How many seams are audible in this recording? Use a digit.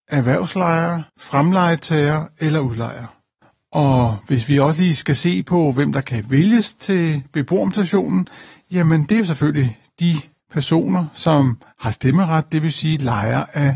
1